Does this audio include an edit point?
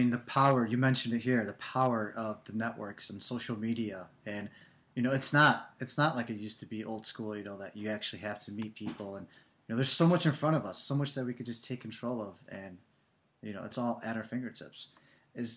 no; 0 cuts

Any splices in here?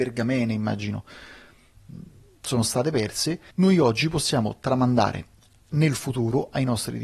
yes; 1 cut; at 3.5 s

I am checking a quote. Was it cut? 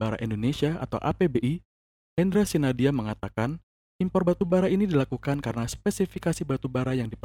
no; 0 cuts

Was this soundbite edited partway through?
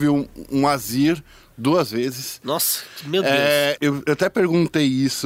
yes; 1 cut; at 3.8 s

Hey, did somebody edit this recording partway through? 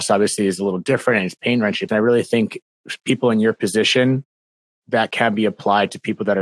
yes; 1 cut; at 1.9 s

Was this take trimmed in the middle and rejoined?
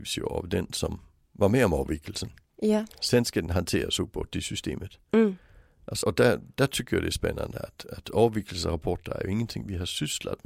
yes; 1 cut; at 6.0 s

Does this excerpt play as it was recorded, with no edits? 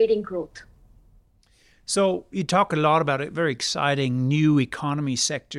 yes; 0 cuts

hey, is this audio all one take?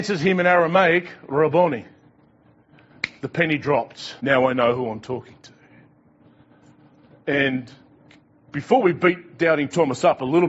no; 1 cut; at 4.2 s

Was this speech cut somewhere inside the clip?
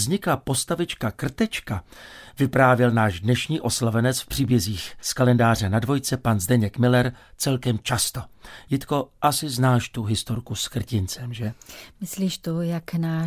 no; 0 cuts

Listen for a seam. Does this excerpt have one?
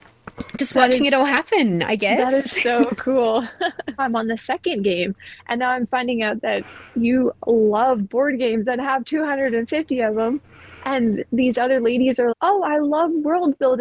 yes; 2 cuts; at 4.0 s, 12.3 s

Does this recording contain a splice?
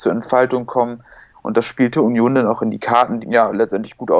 yes; 2 cuts; at 1.3 s, 3.2 s

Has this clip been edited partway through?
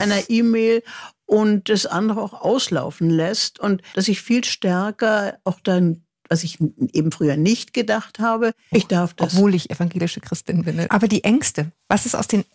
yes; 2 cuts; at 8.7 s, 10.9 s

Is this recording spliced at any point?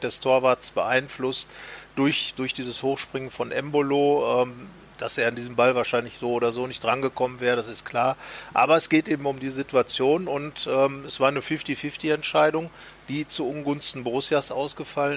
no; 0 cuts

